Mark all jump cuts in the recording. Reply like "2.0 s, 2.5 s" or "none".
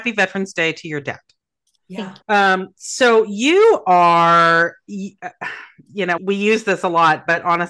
2.2 s, 6.2 s